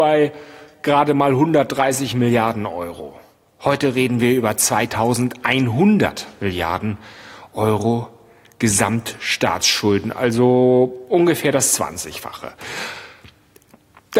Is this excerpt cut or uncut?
uncut